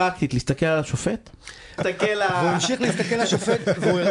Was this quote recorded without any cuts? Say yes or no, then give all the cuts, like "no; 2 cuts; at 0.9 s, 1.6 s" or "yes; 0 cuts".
no; 1 cut; at 1.8 s